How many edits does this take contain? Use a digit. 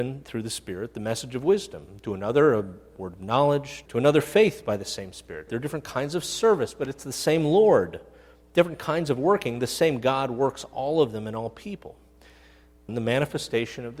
3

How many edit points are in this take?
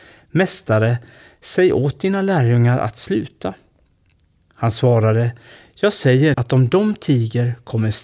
1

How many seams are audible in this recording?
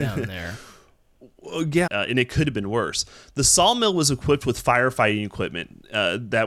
1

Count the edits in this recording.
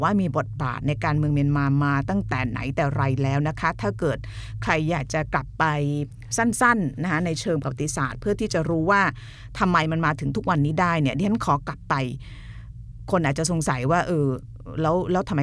0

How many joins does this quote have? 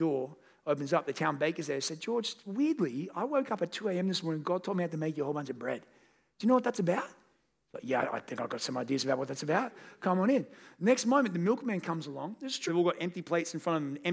1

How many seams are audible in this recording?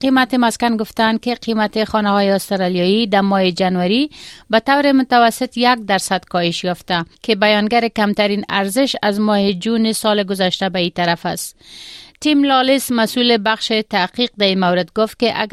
1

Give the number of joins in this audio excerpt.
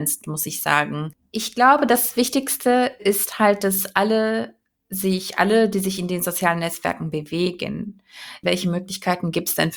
1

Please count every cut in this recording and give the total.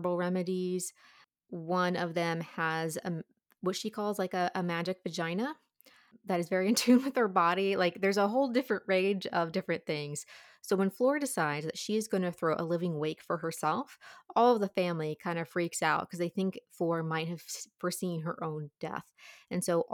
0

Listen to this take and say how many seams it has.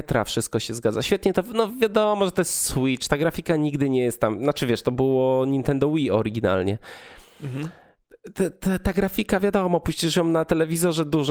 0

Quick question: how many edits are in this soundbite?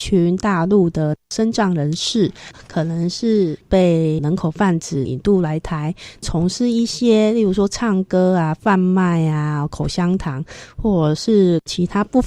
0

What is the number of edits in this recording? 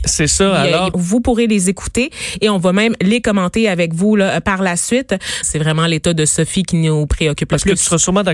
2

